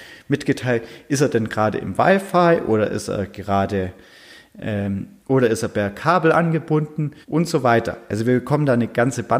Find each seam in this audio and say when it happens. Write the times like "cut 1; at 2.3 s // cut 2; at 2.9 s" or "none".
cut 1; at 5.2 s // cut 2; at 7.2 s